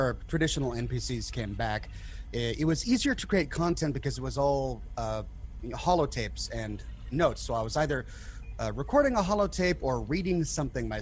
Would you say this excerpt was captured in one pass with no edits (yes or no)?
no